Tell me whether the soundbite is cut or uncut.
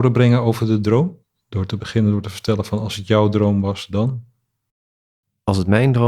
uncut